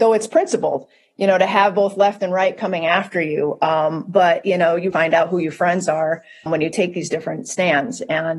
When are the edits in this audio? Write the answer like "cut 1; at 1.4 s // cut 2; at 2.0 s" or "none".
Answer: cut 1; at 4.9 s // cut 2; at 6.5 s

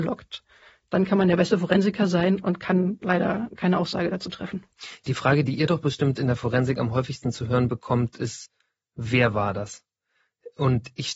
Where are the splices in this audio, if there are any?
none

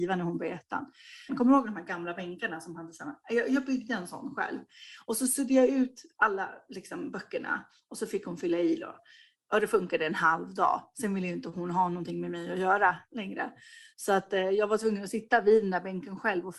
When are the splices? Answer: cut 1; at 1.3 s

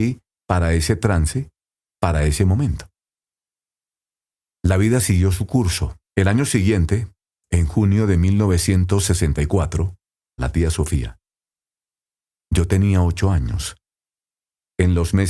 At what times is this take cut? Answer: cut 1; at 6.0 s // cut 2; at 10.4 s

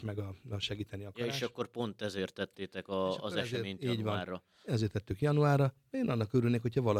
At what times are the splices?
none

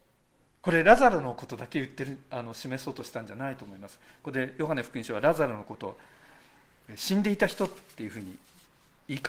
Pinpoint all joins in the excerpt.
none

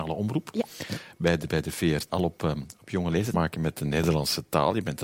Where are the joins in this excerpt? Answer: cut 1; at 2.1 s // cut 2; at 3.3 s

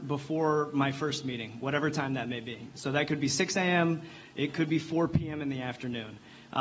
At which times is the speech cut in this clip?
none

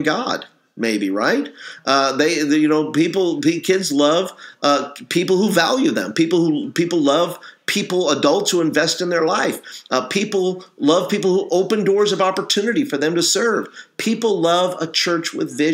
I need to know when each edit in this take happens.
none

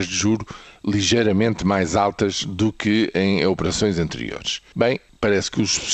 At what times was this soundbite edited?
cut 1; at 4.7 s

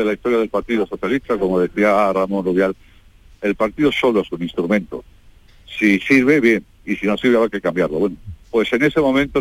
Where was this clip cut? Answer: none

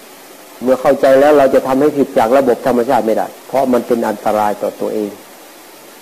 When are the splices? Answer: cut 1; at 3.4 s

